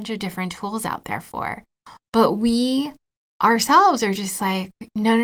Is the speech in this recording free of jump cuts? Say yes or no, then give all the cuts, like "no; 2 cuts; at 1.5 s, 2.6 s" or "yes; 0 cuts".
yes; 0 cuts